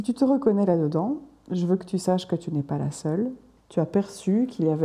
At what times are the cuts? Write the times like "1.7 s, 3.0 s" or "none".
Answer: 3.6 s